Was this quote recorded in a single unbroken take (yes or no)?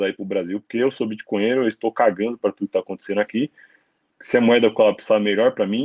yes